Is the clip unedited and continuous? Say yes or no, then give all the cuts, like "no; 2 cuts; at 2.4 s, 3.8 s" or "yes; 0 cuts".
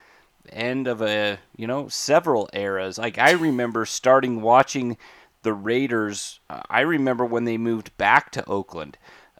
yes; 0 cuts